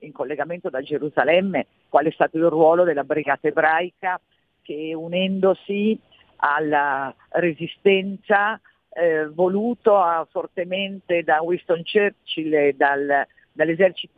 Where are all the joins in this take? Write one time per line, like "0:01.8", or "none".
none